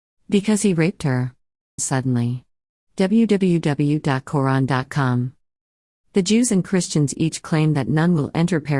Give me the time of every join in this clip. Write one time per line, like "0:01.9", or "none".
0:01.8